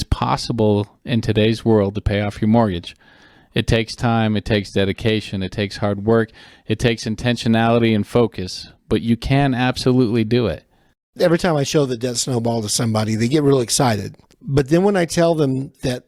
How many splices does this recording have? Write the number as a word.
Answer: zero